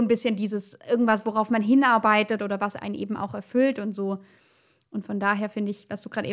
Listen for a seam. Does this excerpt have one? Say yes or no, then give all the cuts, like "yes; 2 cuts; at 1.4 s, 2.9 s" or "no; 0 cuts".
no; 0 cuts